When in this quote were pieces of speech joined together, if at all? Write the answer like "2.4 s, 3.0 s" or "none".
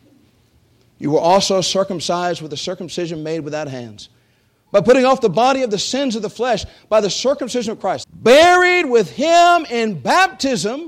8.0 s